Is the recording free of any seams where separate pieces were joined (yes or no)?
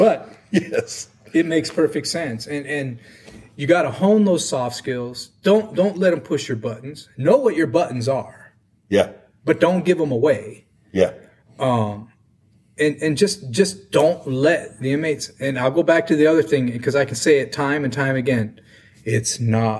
yes